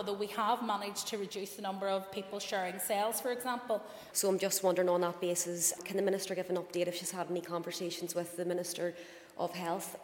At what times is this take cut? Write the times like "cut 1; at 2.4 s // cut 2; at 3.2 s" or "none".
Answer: cut 1; at 4.1 s // cut 2; at 5.8 s